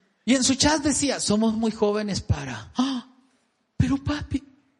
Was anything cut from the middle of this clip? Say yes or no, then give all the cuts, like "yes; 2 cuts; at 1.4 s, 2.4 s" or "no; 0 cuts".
no; 0 cuts